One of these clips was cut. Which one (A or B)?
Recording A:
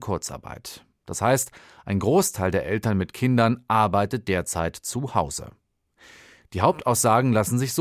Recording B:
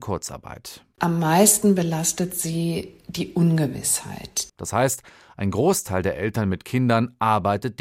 B